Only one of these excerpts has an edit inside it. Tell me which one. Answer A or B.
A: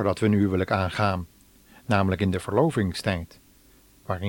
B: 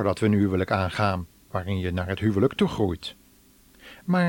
B